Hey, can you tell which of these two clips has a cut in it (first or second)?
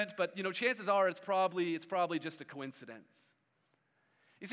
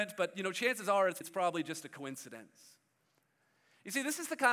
second